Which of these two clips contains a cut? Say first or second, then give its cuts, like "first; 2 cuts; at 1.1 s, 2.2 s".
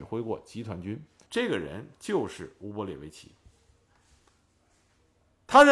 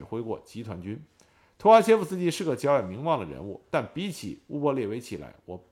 first; 1 cut; at 1.3 s